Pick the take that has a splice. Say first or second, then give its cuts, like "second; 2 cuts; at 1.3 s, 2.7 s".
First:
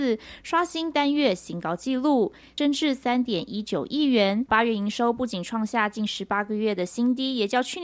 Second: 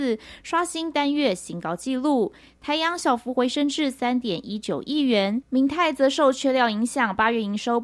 first; 2 cuts; at 2.6 s, 4.5 s